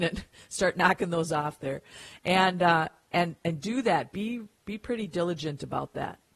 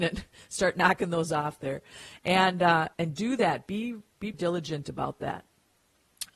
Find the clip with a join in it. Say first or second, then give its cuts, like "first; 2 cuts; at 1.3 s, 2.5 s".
second; 2 cuts; at 2.9 s, 4.3 s